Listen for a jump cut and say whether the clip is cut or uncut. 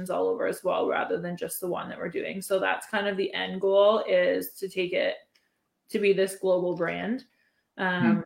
uncut